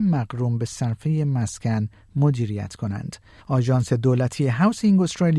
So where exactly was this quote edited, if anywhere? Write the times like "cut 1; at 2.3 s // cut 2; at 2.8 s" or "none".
cut 1; at 3.4 s